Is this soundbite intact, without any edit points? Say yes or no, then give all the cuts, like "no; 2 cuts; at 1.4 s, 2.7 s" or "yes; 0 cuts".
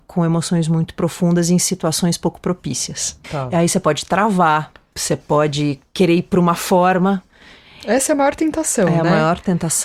no; 1 cut; at 3.2 s